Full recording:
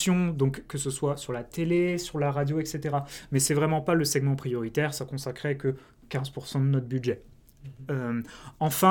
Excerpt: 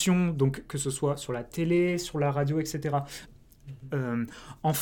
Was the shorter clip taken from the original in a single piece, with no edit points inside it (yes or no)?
no